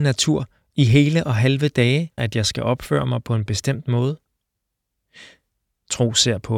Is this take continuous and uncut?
no; 1 cut; at 2.2 s

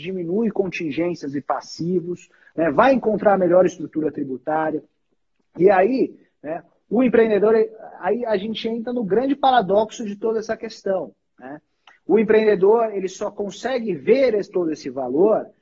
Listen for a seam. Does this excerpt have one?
no; 0 cuts

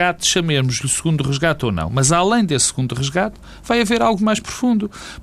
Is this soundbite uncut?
no; 1 cut; at 4.2 s

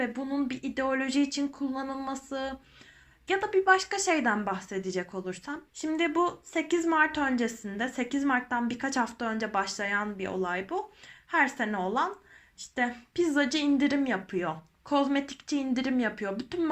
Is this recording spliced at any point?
yes; 1 cut; at 5.7 s

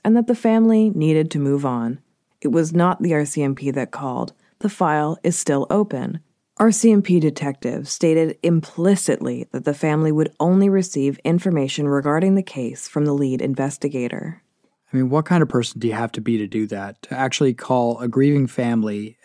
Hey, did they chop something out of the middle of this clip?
yes; 1 cut; at 2.3 s

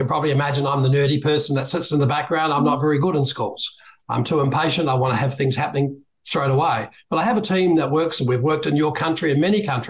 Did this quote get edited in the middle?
no; 0 cuts

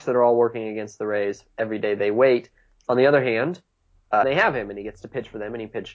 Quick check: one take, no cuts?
no; 1 cut; at 4.2 s

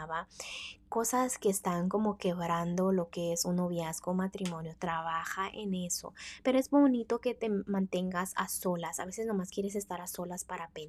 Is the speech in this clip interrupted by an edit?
no; 0 cuts

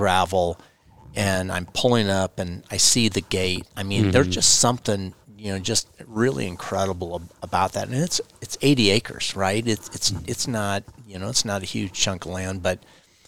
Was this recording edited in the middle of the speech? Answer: no; 0 cuts

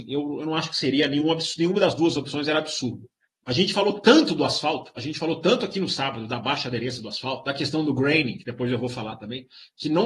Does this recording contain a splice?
yes; 1 cut; at 3.3 s

